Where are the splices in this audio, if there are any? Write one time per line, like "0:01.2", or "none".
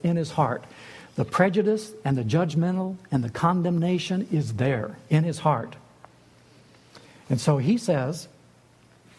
none